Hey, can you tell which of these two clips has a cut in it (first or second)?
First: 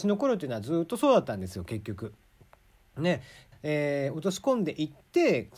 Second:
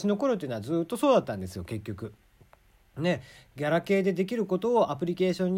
first